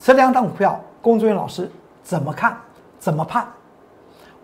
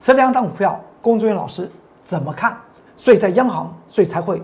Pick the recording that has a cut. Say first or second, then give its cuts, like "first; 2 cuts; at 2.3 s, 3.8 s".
second; 1 cut; at 2.9 s